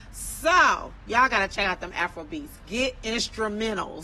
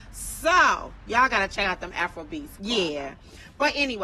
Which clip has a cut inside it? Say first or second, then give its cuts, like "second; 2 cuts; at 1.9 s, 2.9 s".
second; 1 cut; at 2.6 s